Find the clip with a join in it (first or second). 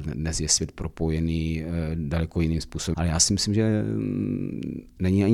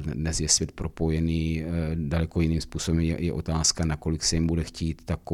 first